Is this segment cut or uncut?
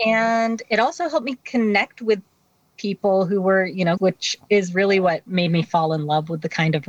cut